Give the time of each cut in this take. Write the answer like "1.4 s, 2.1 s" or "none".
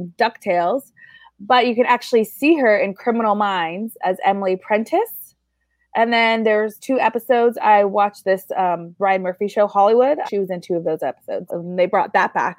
10.3 s, 11.5 s